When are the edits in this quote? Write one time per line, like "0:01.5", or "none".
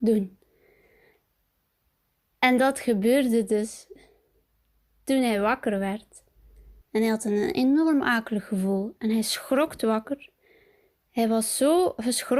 0:06.8